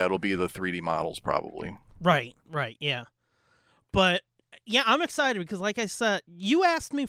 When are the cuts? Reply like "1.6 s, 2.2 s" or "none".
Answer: none